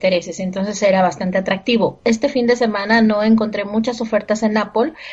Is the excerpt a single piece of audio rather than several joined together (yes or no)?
yes